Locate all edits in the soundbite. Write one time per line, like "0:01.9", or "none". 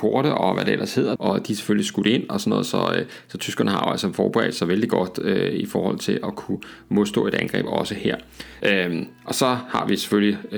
0:01.2
0:08.6